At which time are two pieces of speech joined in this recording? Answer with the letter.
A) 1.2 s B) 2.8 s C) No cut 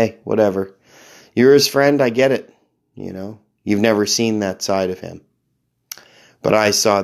C